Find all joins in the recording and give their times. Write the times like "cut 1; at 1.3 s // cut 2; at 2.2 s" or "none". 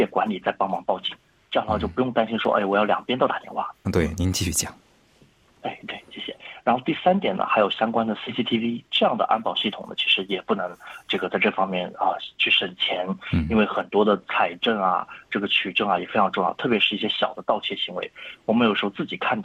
cut 1; at 3.8 s